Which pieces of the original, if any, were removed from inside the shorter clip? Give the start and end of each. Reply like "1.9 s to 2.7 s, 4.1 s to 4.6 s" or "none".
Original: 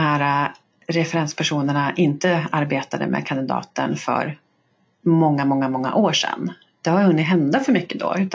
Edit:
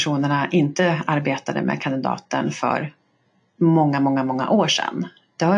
none